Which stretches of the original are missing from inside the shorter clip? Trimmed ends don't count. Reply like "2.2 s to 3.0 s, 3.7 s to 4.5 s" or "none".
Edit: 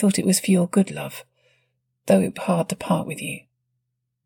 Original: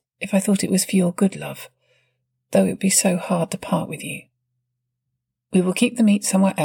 2.8 s to 3.2 s